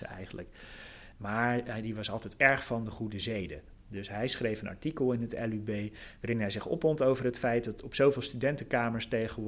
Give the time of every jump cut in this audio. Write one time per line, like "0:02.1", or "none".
0:01.1